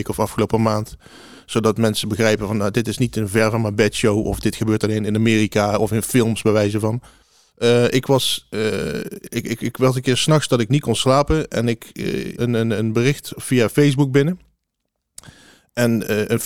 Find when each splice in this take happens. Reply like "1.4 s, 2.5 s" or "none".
12.4 s